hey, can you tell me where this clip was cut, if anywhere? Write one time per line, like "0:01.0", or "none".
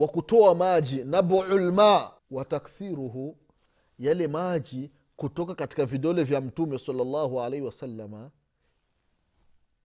0:02.2